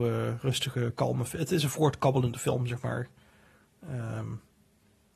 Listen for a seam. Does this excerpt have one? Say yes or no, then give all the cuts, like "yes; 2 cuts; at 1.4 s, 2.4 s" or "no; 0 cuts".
no; 0 cuts